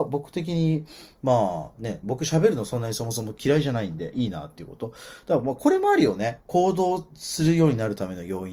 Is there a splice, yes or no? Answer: no